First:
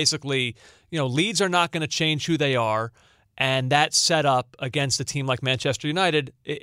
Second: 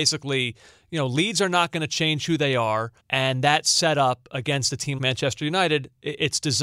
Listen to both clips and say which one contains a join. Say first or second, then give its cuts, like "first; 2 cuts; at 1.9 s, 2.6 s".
second; 2 cuts; at 3.0 s, 5.0 s